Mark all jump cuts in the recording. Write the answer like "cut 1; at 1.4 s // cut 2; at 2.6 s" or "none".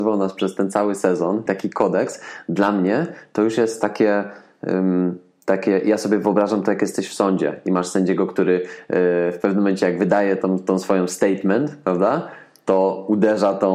cut 1; at 1.5 s